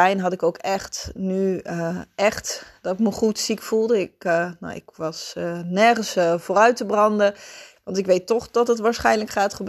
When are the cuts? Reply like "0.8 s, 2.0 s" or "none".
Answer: 7.8 s